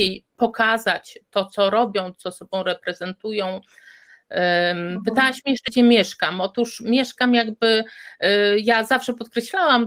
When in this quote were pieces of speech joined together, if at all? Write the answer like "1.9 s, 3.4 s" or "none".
none